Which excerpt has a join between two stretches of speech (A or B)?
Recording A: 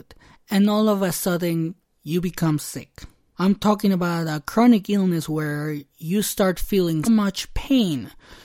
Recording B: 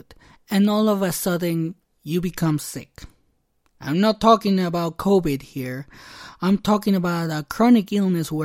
A